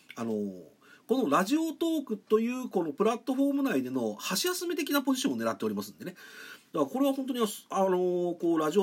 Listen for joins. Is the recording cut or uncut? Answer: cut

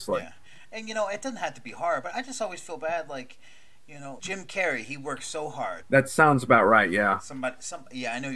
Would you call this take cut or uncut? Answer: cut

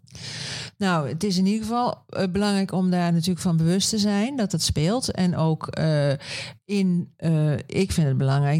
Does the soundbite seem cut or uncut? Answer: uncut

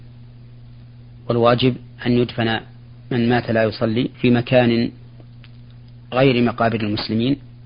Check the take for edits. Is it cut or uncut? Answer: cut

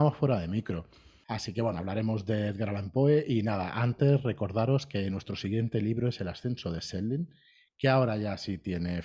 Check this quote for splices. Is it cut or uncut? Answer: cut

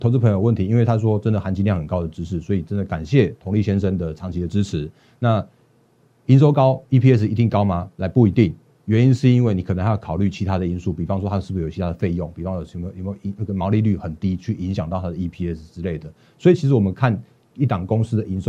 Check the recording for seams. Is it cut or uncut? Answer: uncut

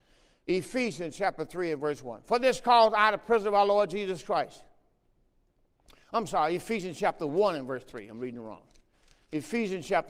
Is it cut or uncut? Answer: uncut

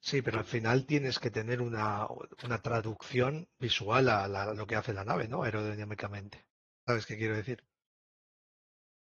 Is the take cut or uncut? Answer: uncut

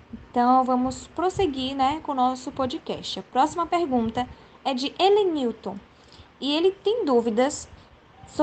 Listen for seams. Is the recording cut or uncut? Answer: uncut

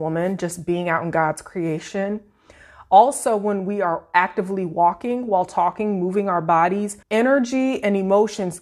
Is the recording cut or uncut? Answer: cut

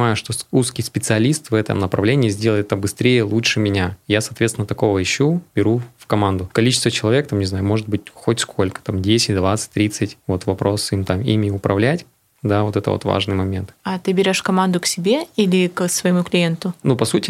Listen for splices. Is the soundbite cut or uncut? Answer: uncut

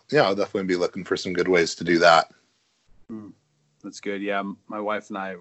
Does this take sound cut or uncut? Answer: cut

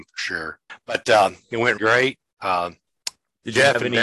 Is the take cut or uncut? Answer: cut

